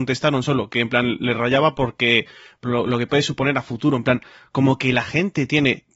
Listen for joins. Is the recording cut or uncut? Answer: uncut